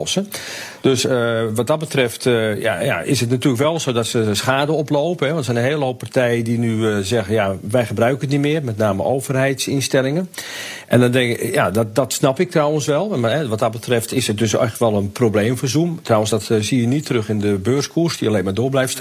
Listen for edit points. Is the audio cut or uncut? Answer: uncut